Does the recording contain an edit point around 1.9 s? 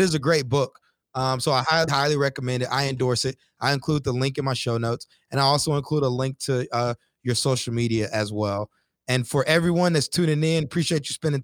yes; 1 cut; at 1.9 s

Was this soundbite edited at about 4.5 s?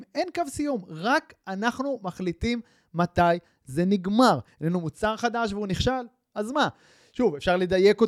yes; 1 cut; at 4.5 s

